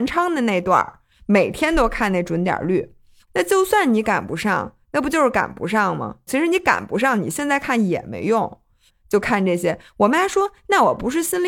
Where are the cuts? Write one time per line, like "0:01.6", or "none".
0:03.2
0:06.3
0:08.9